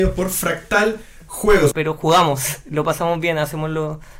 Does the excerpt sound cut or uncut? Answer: cut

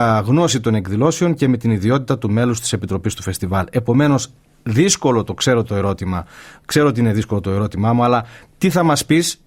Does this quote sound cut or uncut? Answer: uncut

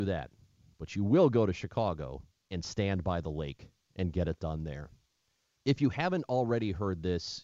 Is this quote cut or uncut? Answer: cut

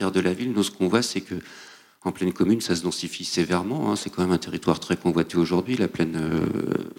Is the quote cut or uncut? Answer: uncut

